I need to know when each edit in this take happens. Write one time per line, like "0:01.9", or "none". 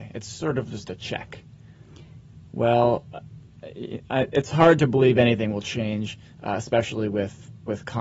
0:02.4